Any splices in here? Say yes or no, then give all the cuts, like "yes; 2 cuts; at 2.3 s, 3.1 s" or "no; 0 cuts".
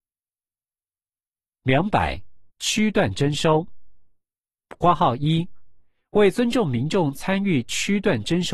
yes; 1 cut; at 2.5 s